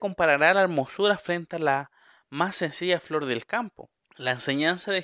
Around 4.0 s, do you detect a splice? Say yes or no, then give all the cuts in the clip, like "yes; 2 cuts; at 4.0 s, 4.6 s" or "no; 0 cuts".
yes; 1 cut; at 4.0 s